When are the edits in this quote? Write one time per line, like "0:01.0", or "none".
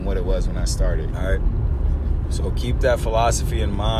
0:01.1